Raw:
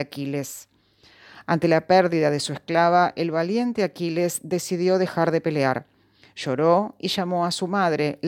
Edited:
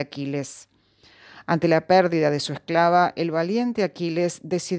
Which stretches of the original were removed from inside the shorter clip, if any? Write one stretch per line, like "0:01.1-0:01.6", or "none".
none